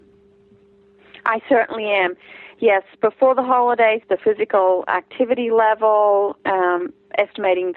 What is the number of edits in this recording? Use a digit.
2